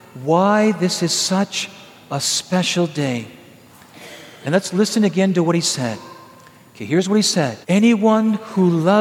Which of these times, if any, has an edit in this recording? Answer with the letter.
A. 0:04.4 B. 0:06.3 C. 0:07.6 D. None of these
C